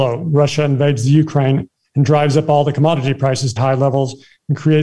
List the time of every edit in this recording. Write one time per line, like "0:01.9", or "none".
0:03.6

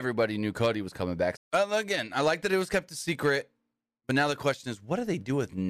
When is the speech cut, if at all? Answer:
0:01.4

